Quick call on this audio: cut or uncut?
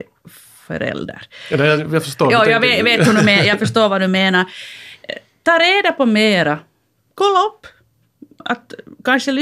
uncut